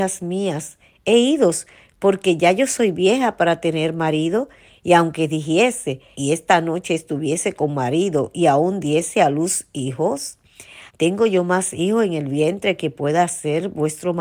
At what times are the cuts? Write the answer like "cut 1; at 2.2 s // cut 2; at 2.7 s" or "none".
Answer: cut 1; at 6.1 s // cut 2; at 10.9 s